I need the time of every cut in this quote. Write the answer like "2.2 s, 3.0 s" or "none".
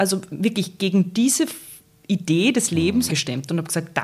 3.1 s